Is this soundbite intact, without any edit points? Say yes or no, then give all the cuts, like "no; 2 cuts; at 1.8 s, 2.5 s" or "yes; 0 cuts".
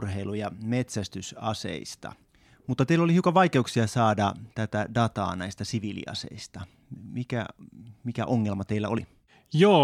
yes; 0 cuts